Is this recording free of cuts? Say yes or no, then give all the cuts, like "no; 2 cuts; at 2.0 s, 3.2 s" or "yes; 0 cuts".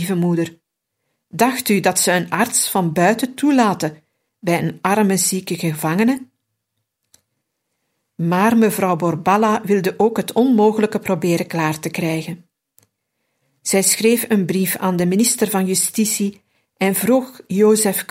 yes; 0 cuts